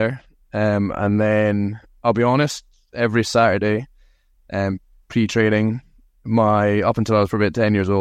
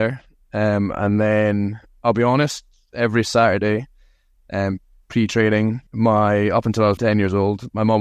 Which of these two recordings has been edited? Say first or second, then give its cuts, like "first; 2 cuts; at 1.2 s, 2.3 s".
second; 2 cuts; at 5.9 s, 7.0 s